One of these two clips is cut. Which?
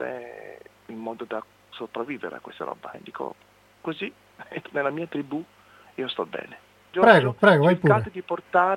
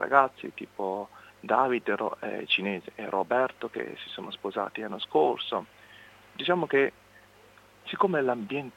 first; 3 cuts; at 2.9 s, 4.6 s, 6.9 s

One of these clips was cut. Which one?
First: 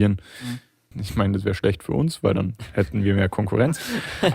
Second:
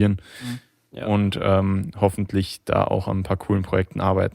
first; 1 cut; at 0.9 s

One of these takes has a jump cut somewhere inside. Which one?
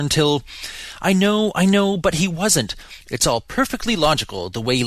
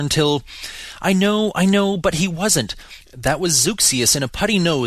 first; 1 cut; at 3.1 s

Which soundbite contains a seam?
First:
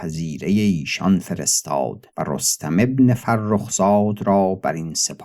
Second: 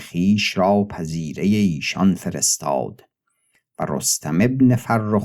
first; 1 cut; at 2.1 s

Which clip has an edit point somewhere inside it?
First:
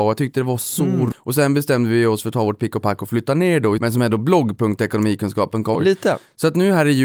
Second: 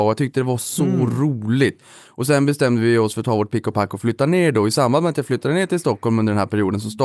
first; 3 cuts; at 1.1 s, 3.8 s, 5.7 s

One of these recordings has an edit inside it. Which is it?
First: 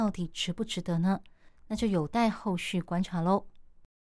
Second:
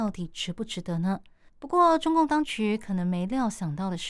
second; 1 cut; at 1.5 s

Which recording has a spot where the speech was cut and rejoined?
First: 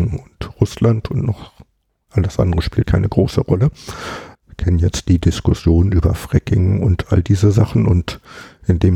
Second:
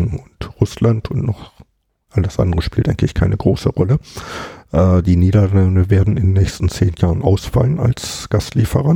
first; 2 cuts; at 2.8 s, 4.4 s

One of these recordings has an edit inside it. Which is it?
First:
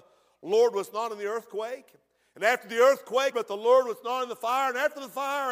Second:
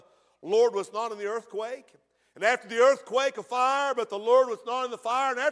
first; 1 cut; at 3.3 s

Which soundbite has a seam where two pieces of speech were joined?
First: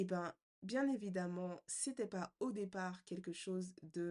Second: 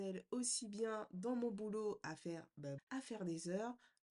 second; 1 cut; at 2.8 s

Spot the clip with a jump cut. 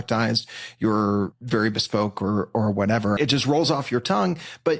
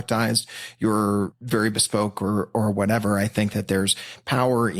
first; 1 cut; at 3.2 s

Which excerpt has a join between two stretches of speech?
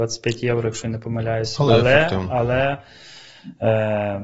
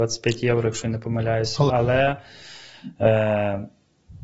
second; 1 cut; at 1.7 s

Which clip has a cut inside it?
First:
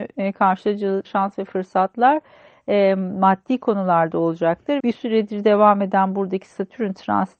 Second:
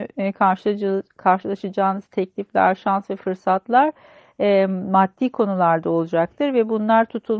first; 2 cuts; at 1.0 s, 4.8 s

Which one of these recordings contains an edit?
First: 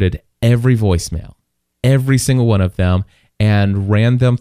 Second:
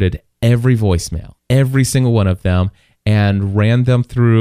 second; 1 cut; at 1.4 s

